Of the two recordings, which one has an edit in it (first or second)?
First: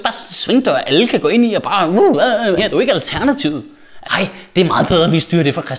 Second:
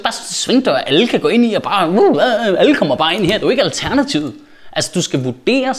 first